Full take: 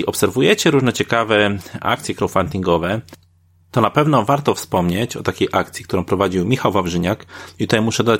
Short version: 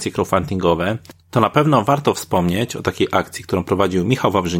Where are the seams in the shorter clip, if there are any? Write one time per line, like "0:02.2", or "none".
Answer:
0:01.2